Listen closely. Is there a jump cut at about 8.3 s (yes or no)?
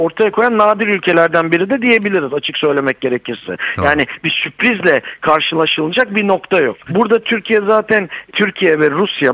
yes